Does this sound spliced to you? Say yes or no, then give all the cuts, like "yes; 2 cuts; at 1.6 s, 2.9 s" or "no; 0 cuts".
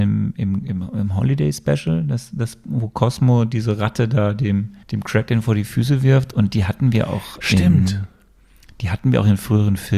yes; 1 cut; at 4.8 s